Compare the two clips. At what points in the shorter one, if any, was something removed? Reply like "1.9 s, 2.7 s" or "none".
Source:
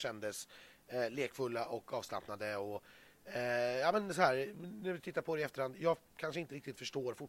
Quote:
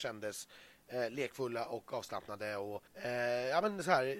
2.9 s